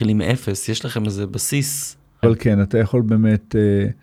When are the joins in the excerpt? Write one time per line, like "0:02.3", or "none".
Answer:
0:02.2